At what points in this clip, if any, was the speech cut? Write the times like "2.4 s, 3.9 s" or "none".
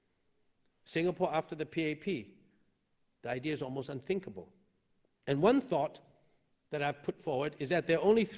5.2 s